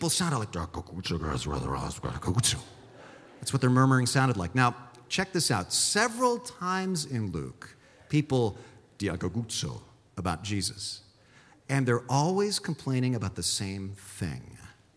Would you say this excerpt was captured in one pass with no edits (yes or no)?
yes